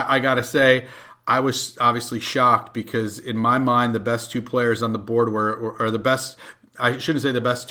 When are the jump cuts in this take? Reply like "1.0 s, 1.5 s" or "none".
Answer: none